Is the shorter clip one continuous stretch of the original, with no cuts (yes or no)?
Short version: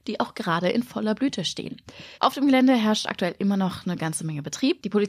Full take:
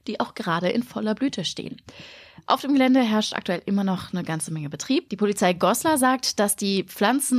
no